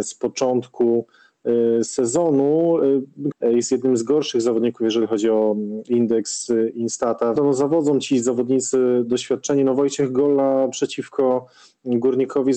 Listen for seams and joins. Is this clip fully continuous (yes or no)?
no